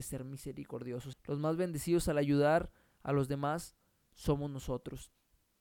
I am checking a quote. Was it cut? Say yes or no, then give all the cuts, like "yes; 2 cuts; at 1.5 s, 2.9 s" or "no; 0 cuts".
yes; 1 cut; at 1.1 s